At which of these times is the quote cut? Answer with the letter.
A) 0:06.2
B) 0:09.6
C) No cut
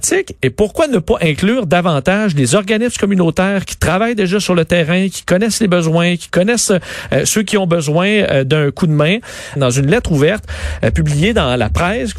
B